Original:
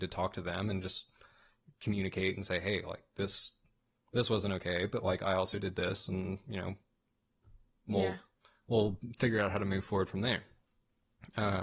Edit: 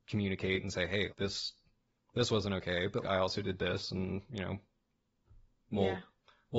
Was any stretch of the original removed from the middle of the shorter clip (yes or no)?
yes